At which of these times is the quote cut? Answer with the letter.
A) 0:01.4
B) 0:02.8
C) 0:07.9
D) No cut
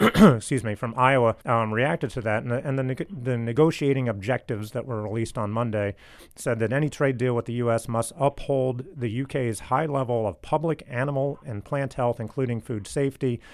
A